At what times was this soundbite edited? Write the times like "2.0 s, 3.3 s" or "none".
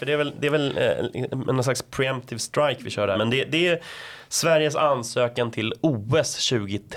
3.1 s